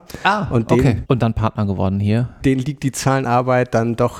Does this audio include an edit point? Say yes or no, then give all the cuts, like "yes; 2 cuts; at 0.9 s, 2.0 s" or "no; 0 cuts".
yes; 2 cuts; at 1.0 s, 2.4 s